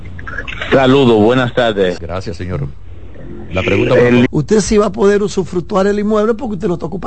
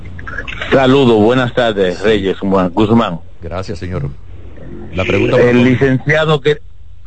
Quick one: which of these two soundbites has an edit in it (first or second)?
first